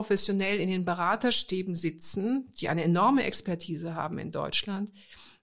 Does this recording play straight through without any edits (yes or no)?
yes